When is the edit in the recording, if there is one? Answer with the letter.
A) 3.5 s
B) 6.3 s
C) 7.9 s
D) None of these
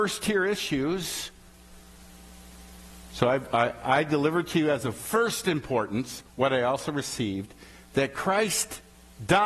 B